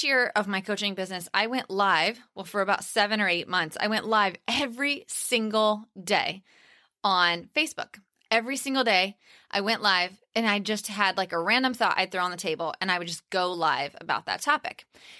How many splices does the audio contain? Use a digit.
0